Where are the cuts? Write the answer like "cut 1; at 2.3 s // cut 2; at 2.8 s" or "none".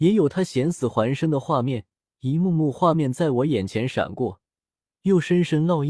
none